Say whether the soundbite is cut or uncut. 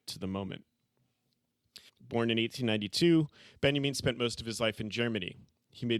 cut